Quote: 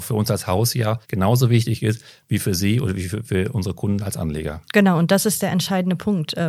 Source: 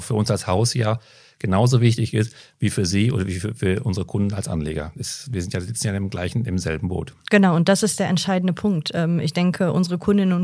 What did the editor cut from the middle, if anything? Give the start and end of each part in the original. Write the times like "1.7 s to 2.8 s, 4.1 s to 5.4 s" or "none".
1.0 s to 1.4 s, 4.9 s to 7.2 s